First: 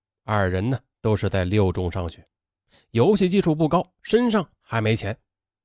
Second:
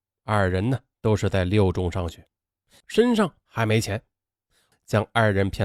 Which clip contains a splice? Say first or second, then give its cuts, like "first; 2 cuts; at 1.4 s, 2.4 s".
second; 2 cuts; at 2.8 s, 4.7 s